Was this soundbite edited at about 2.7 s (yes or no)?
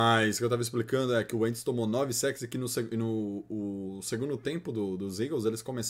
no